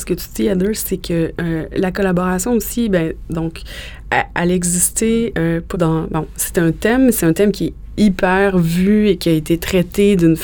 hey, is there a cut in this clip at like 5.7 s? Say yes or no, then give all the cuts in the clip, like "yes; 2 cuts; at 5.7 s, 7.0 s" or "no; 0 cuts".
yes; 1 cut; at 5.7 s